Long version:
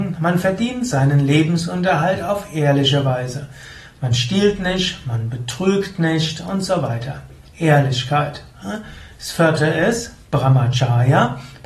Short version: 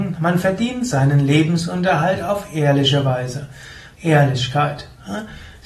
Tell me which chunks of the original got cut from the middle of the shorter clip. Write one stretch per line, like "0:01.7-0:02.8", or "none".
0:03.9-0:07.5